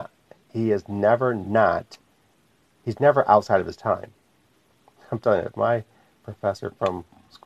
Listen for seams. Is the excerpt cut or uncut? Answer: cut